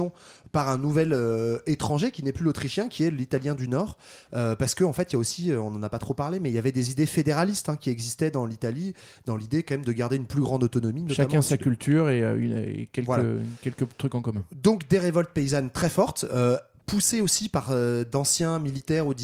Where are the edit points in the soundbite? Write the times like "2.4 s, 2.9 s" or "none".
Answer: none